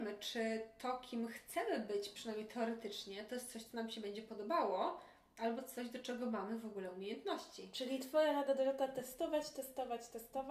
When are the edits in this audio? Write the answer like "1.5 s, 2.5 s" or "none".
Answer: none